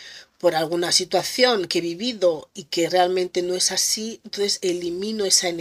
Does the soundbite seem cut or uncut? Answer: uncut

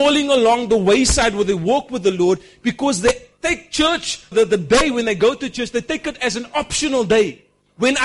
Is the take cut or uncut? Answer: cut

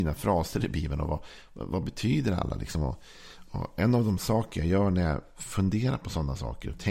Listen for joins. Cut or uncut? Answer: uncut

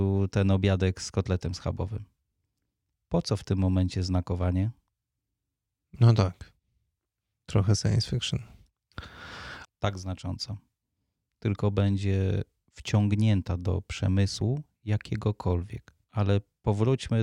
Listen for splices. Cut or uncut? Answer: cut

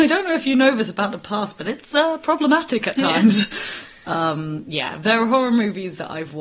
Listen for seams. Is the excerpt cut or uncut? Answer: uncut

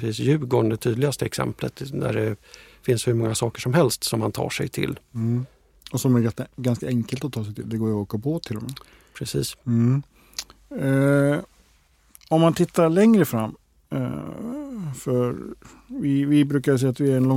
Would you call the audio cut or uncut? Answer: uncut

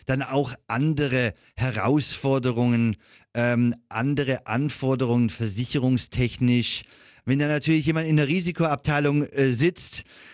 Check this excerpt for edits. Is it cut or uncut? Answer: cut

